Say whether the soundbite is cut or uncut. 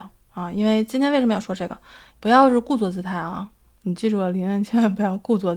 cut